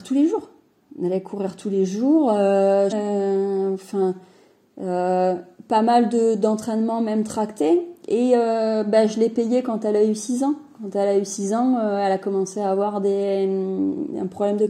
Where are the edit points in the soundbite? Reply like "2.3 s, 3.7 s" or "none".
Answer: 2.9 s